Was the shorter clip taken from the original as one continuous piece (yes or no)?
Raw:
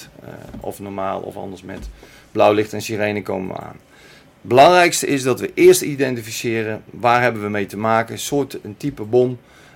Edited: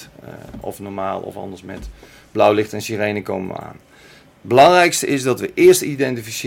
yes